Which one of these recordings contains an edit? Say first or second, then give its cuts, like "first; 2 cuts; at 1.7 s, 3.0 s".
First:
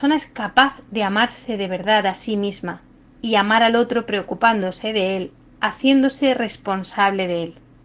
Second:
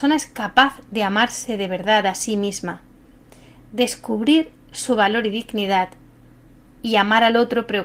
first; 1 cut; at 3.0 s